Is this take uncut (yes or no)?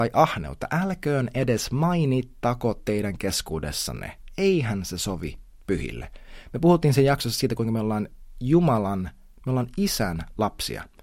yes